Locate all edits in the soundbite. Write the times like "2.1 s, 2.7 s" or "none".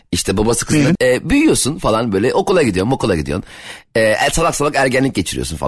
1.0 s